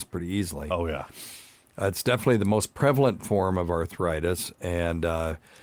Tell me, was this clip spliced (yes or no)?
no